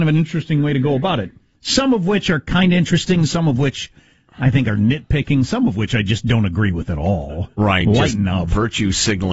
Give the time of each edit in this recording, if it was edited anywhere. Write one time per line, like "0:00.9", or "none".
none